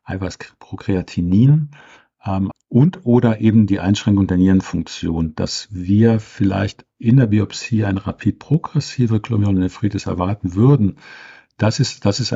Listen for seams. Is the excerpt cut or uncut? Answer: cut